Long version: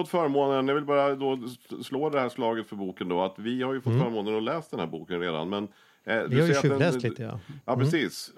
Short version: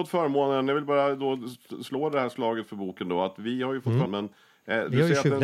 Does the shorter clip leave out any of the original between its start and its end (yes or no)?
yes